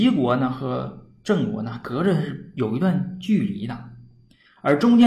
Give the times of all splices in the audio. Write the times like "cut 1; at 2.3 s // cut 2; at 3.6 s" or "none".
none